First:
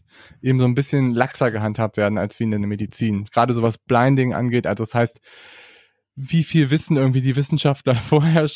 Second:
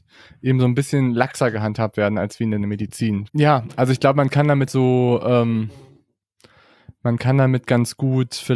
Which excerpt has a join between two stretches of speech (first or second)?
second